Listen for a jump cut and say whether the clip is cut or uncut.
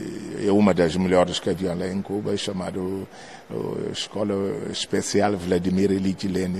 uncut